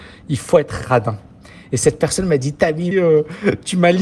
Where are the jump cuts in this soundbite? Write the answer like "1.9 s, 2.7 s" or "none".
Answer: 2.9 s